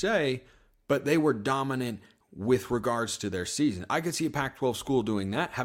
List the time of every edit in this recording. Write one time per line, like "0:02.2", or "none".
none